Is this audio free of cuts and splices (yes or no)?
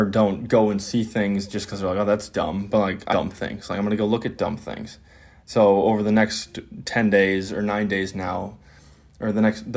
no